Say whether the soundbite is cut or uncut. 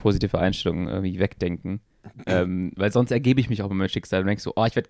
uncut